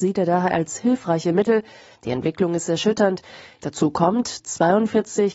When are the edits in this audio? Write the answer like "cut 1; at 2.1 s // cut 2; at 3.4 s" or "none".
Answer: cut 1; at 2.0 s // cut 2; at 3.6 s